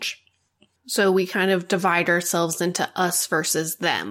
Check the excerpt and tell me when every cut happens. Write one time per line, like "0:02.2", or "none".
none